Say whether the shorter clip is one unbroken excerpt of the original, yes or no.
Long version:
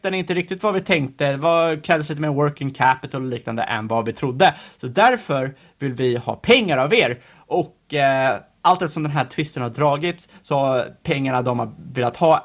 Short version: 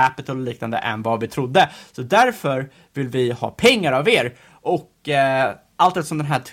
yes